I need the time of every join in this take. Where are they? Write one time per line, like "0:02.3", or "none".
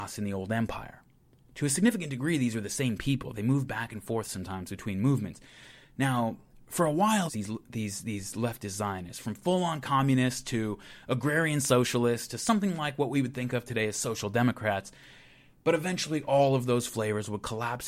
0:07.3